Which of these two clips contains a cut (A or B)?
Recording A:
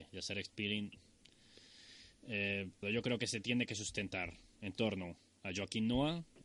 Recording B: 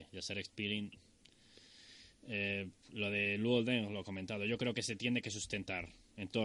A